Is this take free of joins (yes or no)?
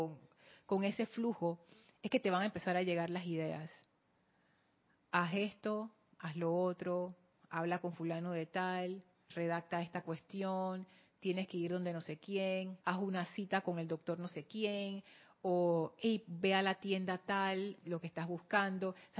no